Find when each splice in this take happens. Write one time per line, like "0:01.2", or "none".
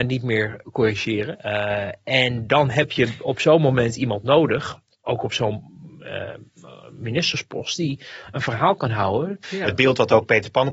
0:01.3
0:09.4